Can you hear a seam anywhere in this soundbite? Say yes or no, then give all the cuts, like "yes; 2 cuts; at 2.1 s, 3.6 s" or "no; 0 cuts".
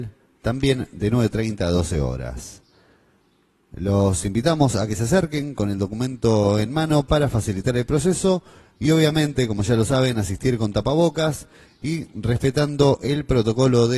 no; 0 cuts